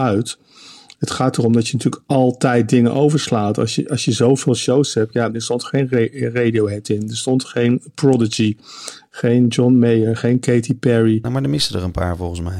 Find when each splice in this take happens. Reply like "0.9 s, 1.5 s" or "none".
5.3 s, 11.2 s